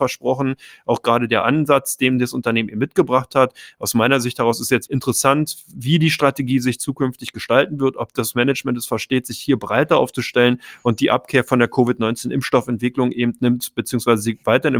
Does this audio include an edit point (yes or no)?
yes